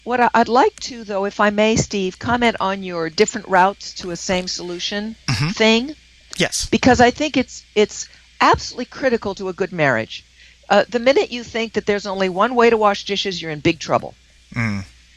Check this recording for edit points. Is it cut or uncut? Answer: uncut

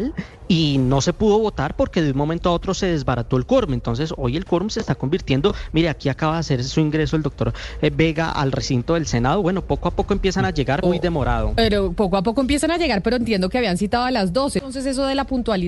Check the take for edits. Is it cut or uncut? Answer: cut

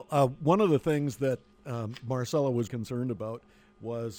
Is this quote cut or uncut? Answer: cut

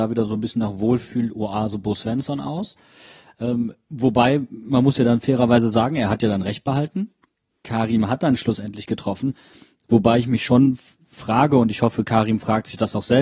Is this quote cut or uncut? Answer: uncut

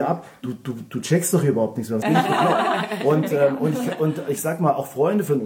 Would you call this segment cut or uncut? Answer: cut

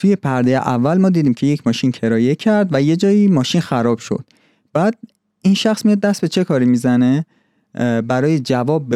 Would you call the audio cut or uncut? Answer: uncut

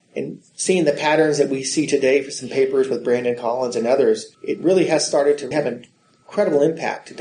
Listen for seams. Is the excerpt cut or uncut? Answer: cut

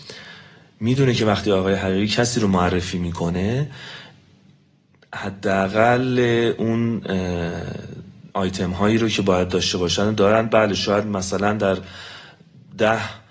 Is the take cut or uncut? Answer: cut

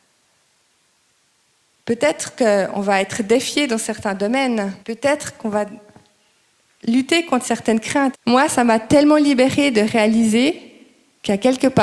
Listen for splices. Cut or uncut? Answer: cut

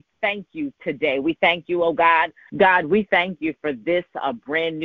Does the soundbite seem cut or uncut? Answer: cut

